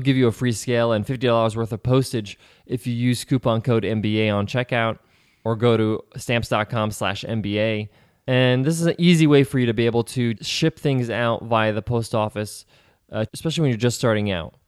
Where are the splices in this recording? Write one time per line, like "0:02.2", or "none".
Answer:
0:10.4
0:13.3